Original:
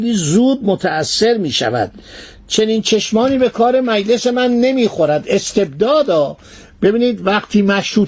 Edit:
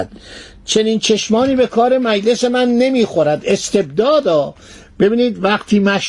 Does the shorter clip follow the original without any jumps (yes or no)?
yes